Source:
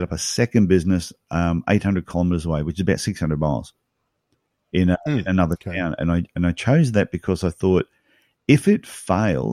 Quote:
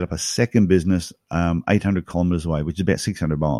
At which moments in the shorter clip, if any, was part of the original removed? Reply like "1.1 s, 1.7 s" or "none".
none